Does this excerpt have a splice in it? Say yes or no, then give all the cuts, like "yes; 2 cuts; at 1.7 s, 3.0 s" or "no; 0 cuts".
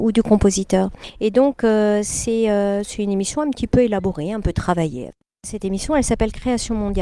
no; 0 cuts